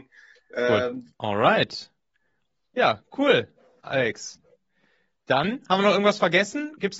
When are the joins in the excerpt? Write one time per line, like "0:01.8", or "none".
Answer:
0:01.1